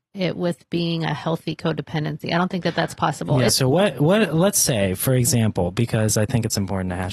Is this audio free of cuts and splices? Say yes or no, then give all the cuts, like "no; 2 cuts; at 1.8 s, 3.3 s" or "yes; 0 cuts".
no; 1 cut; at 3.5 s